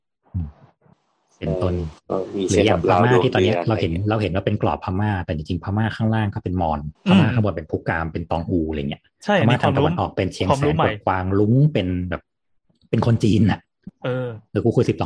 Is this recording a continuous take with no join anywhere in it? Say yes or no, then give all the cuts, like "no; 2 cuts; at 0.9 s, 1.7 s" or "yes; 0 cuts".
no; 1 cut; at 6.9 s